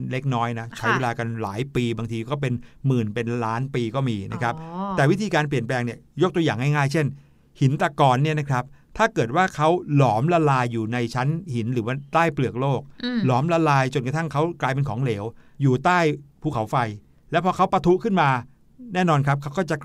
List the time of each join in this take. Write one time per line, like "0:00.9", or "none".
none